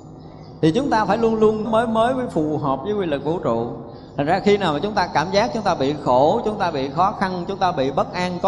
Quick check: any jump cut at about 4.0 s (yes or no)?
no